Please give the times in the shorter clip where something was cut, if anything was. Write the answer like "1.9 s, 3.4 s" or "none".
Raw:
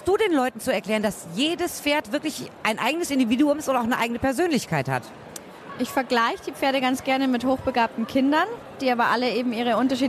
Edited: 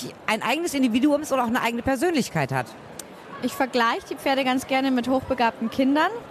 none